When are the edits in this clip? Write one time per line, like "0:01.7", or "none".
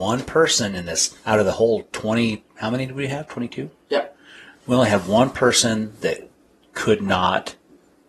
0:01.2

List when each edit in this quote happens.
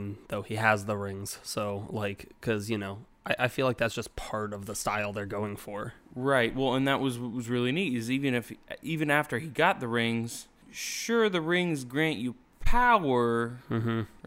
none

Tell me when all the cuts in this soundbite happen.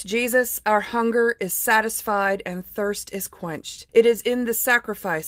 0:03.9

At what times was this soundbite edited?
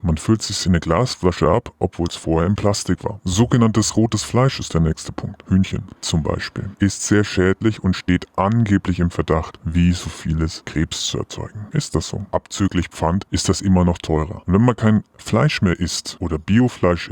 0:12.3

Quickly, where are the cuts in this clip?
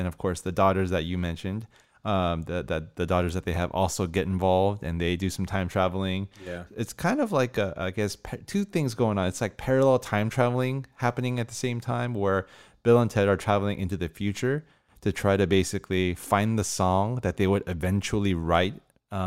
none

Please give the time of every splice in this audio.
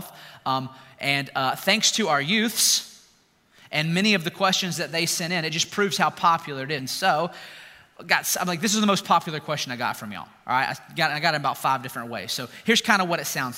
0:06.8

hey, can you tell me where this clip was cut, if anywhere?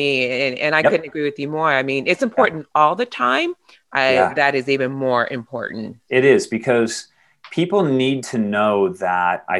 0:03.7
0:06.1

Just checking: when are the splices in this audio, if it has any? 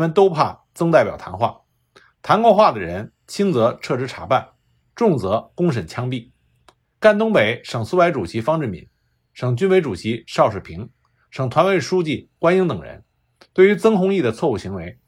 0:06.8

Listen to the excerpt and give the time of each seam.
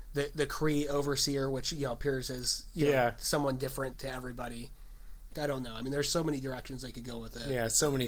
0:03.9
0:05.3

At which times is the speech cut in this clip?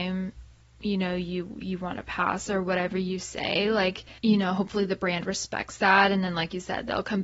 0:04.2

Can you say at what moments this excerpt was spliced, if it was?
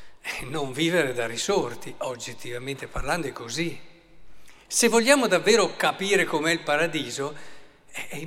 none

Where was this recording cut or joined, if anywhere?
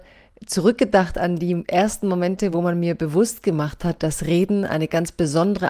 none

